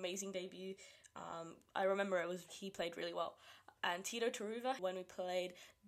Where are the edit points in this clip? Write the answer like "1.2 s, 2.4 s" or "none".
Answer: 2.5 s, 3.8 s, 4.8 s